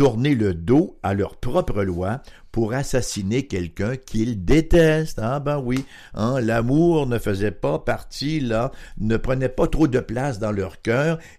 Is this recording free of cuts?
no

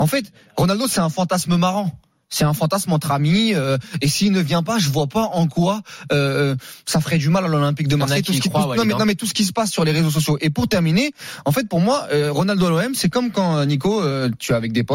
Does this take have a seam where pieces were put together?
no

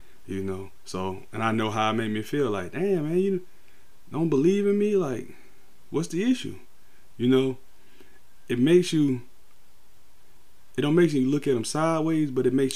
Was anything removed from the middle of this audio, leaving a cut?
no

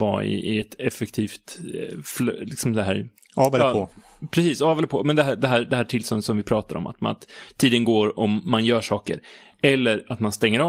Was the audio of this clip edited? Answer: no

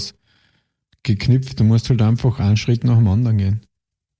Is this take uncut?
yes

